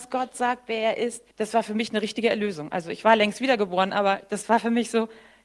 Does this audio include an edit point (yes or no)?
yes